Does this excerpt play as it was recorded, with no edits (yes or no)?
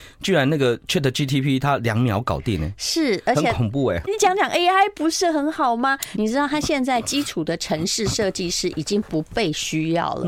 no